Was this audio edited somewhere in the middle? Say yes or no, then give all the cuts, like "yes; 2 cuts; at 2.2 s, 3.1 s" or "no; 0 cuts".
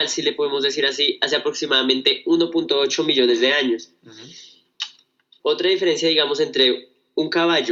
yes; 1 cut; at 5.4 s